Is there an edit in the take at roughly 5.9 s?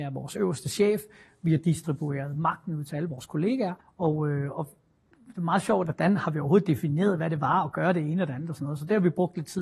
yes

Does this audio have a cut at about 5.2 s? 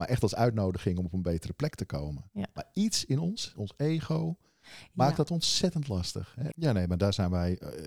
no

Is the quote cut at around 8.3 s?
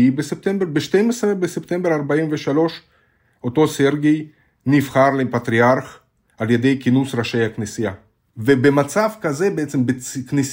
yes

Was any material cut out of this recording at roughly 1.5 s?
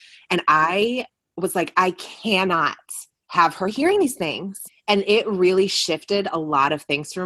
no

